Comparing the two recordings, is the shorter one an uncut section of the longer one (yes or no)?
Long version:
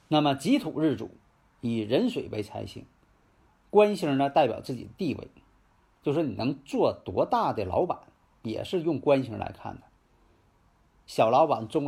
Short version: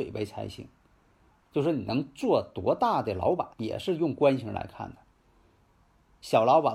no